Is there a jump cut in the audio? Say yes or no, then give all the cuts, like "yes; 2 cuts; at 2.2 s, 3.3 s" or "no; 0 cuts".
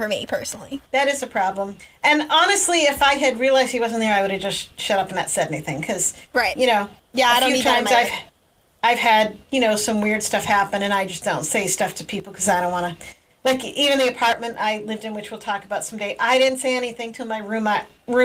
no; 0 cuts